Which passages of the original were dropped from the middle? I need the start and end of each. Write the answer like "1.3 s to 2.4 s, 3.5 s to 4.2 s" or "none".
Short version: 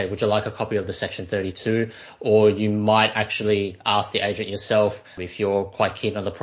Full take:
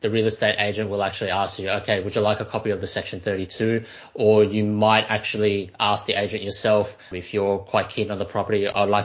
none